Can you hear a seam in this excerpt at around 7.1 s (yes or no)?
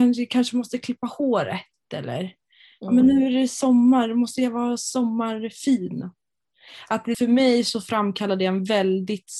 yes